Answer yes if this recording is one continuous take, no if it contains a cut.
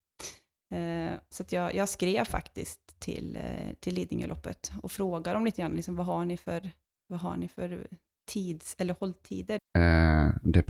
no